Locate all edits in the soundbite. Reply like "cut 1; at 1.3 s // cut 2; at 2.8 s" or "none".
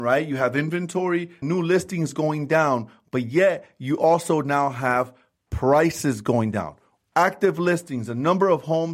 cut 1; at 1.4 s // cut 2; at 7.0 s